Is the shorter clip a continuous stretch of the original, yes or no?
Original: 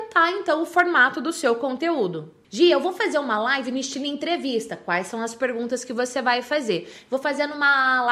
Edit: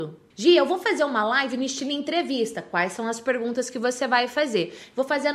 yes